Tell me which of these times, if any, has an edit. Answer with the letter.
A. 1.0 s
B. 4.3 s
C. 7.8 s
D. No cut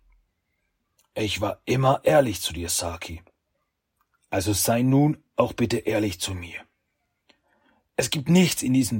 A